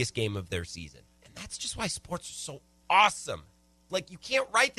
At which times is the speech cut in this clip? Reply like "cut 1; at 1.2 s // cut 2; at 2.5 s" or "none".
cut 1; at 3.9 s